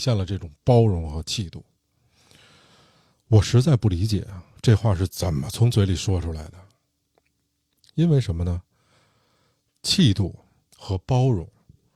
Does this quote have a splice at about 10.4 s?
no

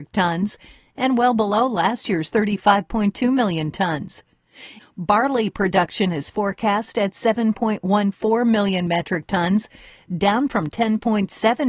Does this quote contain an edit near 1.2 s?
no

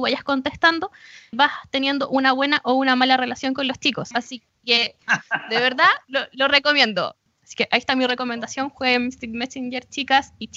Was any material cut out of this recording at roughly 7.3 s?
yes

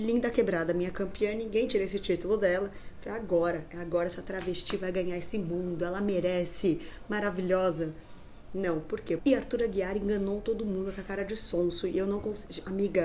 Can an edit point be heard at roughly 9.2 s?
yes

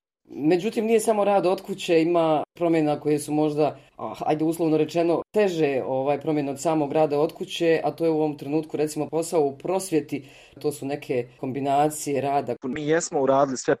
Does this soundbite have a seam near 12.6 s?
yes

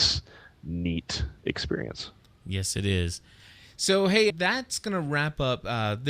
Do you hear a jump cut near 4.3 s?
yes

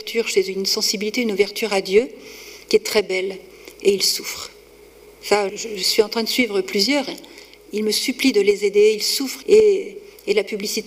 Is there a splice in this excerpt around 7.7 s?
no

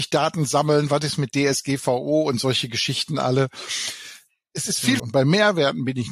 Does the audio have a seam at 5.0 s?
yes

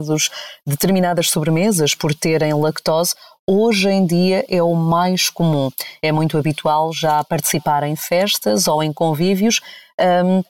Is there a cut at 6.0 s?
no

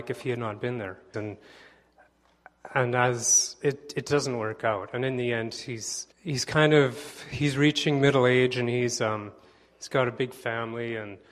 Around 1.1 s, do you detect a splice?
yes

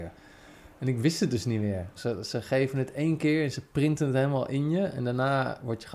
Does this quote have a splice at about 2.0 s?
yes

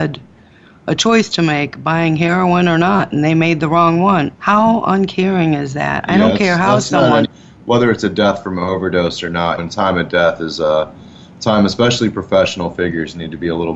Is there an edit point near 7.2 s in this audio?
yes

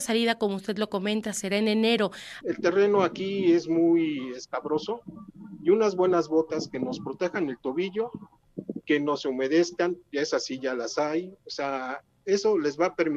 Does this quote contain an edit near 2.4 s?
yes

